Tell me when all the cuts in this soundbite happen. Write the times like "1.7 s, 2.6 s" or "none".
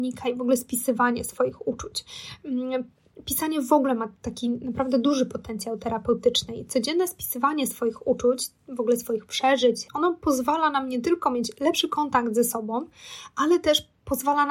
9.9 s